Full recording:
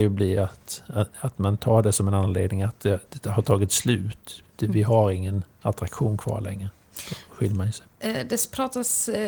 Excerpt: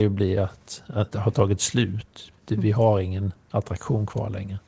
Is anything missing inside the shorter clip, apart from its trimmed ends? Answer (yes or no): yes